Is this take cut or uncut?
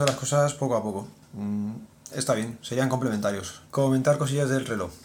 cut